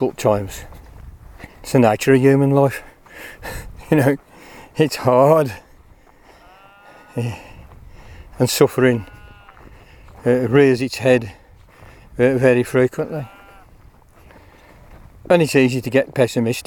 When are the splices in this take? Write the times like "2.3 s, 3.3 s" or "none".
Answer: 1.5 s